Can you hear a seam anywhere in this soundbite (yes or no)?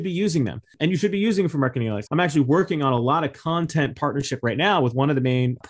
yes